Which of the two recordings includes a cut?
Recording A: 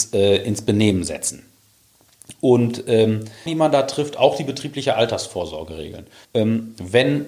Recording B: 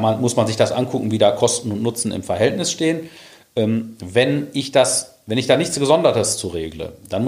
A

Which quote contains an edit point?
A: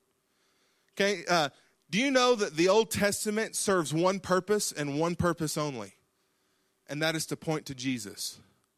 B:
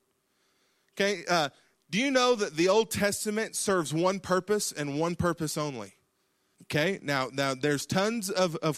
B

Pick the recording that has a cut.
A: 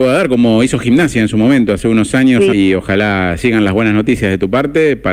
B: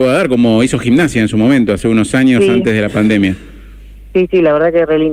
A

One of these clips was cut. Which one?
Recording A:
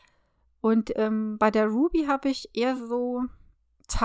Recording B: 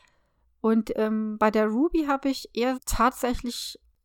B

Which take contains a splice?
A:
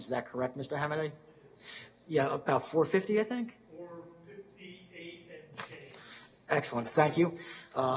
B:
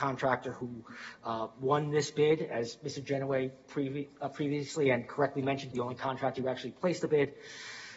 B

